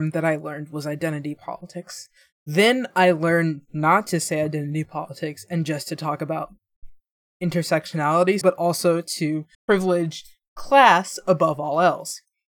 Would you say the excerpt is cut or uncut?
cut